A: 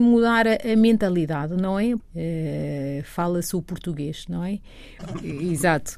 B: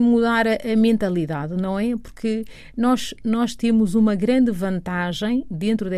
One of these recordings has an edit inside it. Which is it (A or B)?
A